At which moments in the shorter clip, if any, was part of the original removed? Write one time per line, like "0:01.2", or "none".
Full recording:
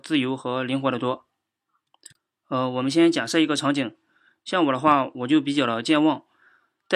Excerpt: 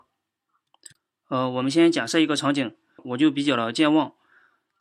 0:03.0